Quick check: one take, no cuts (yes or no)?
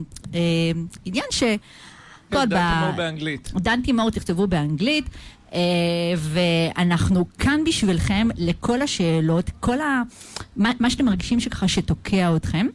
no